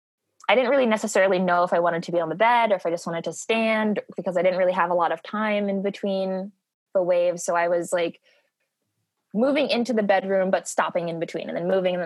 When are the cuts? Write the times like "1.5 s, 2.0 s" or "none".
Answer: none